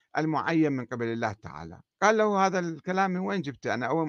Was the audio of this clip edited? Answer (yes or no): yes